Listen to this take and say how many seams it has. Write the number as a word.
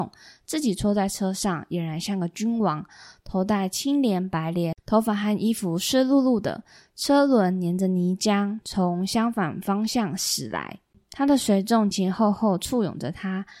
one